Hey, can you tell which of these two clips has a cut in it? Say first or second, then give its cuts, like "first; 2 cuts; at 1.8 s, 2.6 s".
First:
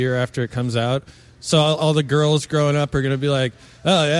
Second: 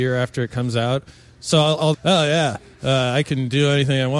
second; 1 cut; at 1.9 s